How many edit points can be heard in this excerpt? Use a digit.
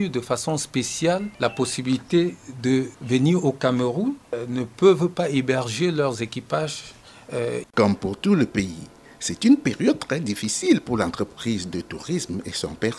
1